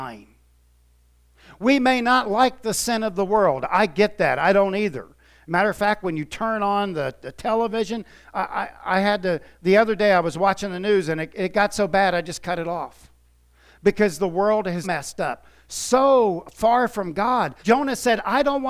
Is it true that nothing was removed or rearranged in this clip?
no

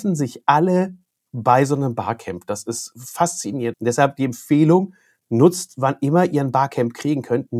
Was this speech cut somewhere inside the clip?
yes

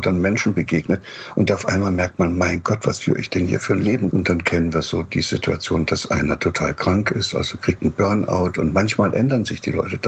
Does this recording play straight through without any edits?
no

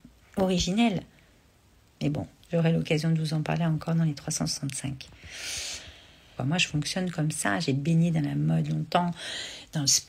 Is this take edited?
yes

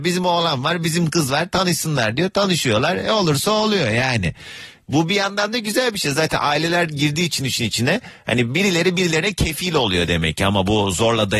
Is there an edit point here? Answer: no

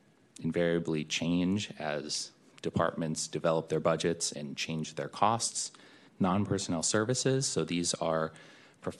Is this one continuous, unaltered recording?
no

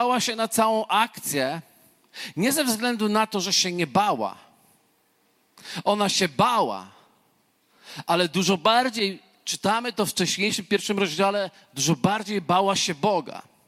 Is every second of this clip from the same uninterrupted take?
yes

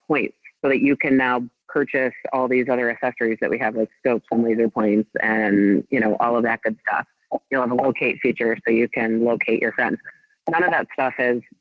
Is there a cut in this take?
no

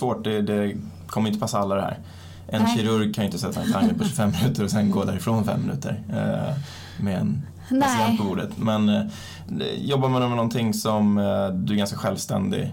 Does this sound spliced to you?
no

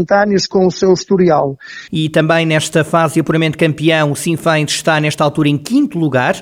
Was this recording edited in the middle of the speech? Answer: yes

